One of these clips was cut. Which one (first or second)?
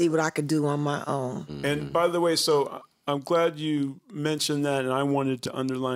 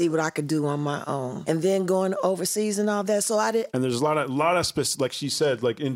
second